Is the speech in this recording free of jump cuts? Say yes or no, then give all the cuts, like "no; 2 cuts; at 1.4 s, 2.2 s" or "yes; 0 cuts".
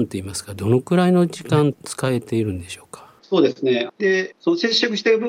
no; 1 cut; at 3.9 s